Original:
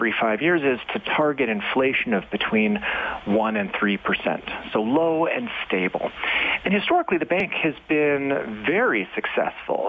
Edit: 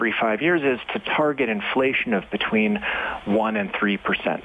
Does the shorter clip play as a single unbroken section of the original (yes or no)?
yes